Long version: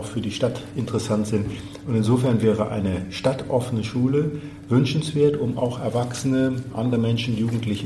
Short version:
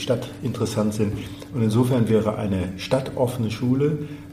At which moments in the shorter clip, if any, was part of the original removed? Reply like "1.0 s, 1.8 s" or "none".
none